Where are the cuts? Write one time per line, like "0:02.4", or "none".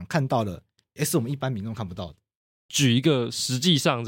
0:01.0